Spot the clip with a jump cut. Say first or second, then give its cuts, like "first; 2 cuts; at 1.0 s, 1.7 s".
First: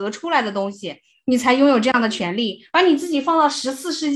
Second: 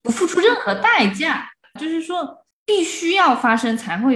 second; 1 cut; at 1.8 s